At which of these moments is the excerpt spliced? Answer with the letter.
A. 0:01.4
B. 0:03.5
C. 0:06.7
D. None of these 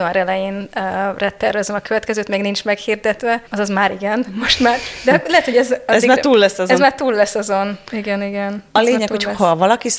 B